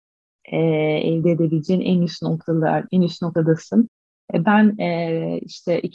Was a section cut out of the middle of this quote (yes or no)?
yes